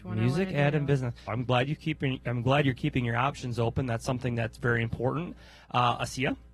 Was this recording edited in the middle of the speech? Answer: yes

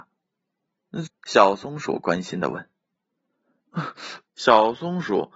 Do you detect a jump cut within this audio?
yes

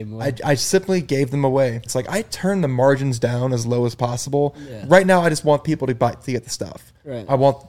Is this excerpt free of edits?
no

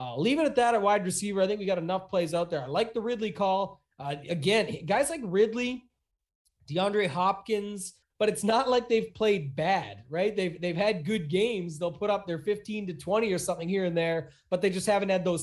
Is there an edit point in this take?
yes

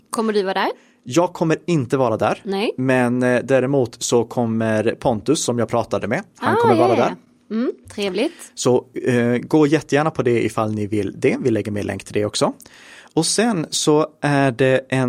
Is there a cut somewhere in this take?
no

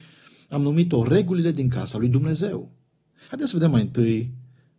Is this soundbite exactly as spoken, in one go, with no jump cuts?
no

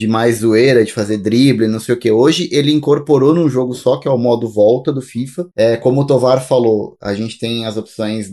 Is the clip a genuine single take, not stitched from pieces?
yes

